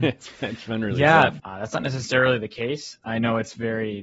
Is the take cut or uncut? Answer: cut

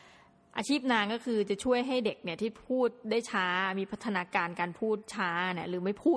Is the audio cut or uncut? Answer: uncut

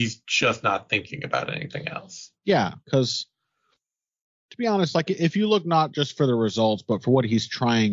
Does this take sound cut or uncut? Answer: cut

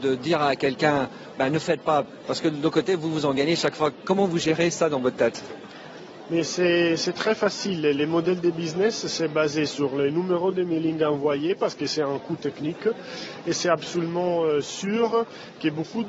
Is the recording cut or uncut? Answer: cut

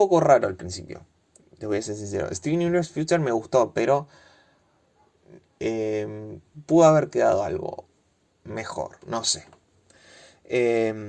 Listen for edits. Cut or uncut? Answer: uncut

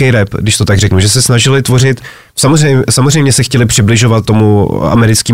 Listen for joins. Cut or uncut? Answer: cut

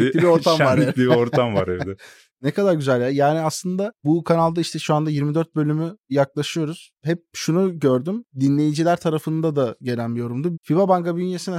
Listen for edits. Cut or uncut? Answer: cut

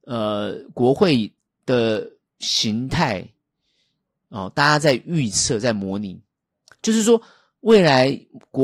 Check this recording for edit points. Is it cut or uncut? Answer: uncut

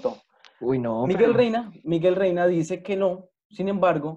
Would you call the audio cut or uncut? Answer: uncut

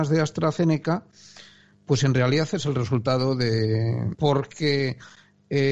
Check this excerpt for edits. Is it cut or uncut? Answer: cut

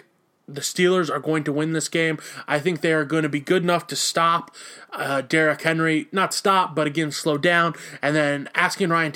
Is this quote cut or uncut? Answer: uncut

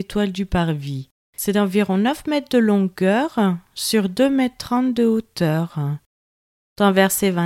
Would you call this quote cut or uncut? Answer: uncut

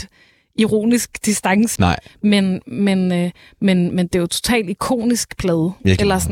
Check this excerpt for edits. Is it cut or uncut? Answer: cut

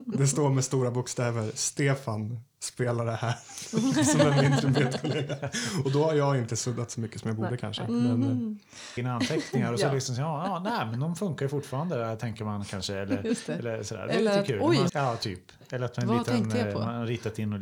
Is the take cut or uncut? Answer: cut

